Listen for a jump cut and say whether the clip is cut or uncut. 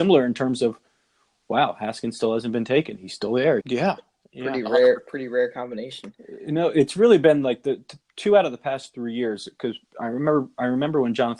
cut